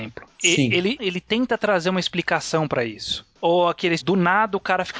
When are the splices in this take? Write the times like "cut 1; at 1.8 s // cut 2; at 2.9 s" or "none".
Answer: cut 1; at 1.0 s // cut 2; at 4.0 s